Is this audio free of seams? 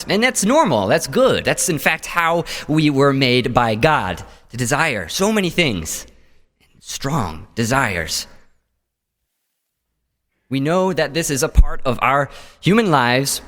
yes; 0 cuts

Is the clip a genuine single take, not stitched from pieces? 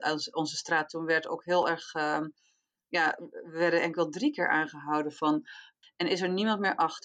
no; 1 cut; at 5.8 s

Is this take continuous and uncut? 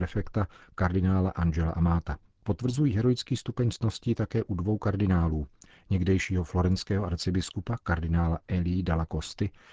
yes; 0 cuts

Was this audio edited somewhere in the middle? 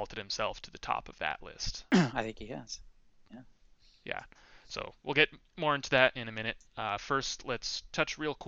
no; 0 cuts

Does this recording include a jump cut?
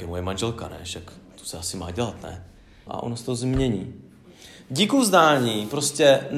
yes; 1 cut; at 2.9 s

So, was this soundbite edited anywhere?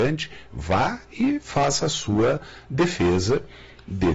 no; 0 cuts

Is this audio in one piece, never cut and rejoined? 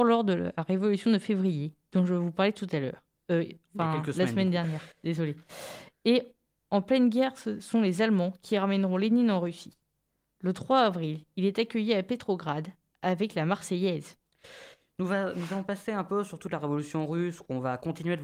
yes; 0 cuts

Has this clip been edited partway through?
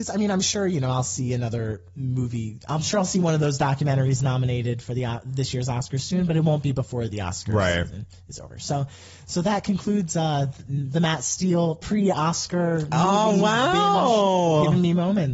no; 0 cuts

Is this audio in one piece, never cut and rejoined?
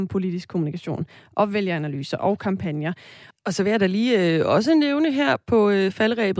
no; 1 cut; at 3.3 s

